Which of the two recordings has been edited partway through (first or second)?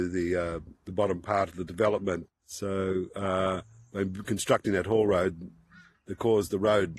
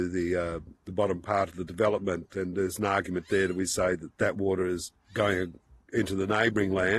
first